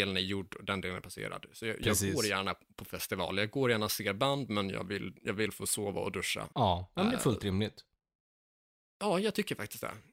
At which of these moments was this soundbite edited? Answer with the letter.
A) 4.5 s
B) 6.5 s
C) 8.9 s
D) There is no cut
B